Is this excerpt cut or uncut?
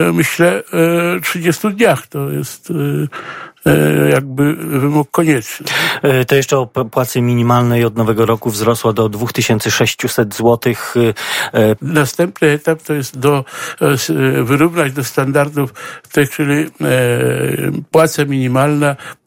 cut